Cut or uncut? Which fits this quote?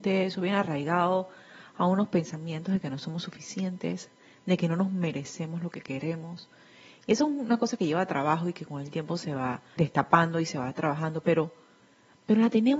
cut